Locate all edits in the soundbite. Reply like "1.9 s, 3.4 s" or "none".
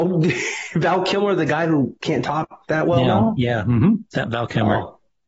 none